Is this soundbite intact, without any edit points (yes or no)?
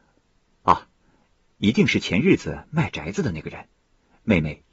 yes